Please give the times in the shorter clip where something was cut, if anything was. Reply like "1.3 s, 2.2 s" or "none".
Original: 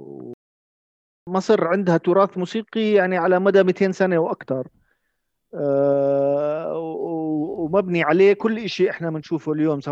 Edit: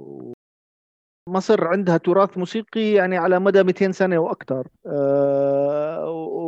4.8 s